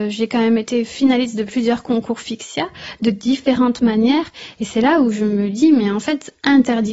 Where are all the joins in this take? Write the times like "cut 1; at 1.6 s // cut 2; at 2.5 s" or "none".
none